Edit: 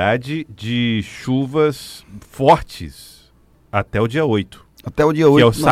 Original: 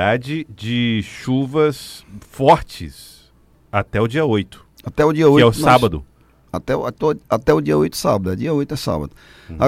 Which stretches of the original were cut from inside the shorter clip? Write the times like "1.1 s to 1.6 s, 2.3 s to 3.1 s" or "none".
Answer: none